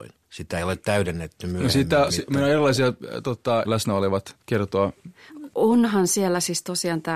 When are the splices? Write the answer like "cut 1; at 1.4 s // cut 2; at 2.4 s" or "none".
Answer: cut 1; at 2.1 s // cut 2; at 3.6 s